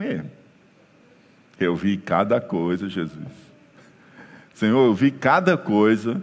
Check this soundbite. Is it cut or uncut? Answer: uncut